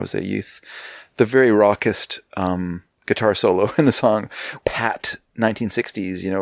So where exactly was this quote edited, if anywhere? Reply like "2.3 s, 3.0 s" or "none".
4.6 s